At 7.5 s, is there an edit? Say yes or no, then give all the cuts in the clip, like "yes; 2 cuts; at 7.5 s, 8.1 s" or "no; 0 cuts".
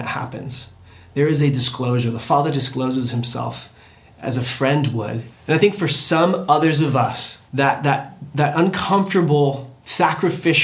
yes; 2 cuts; at 5.3 s, 7.5 s